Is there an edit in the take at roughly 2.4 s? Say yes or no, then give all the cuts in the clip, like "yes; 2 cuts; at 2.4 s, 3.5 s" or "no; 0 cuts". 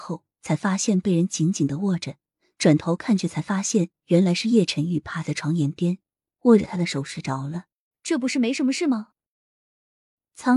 no; 1 cut; at 7.9 s